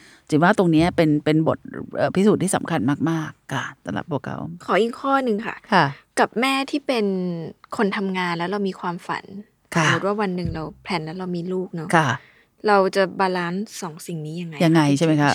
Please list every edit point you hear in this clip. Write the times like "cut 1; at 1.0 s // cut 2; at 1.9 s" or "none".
none